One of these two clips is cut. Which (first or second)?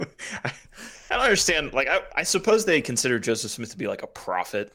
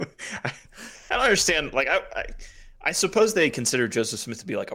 first